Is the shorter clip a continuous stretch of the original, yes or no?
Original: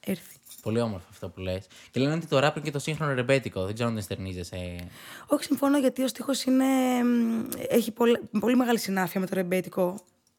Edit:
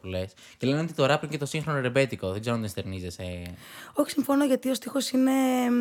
yes